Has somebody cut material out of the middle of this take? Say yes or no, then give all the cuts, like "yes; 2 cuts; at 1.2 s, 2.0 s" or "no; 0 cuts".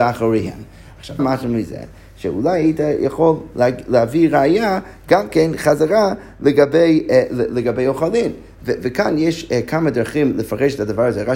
yes; 1 cut; at 1.2 s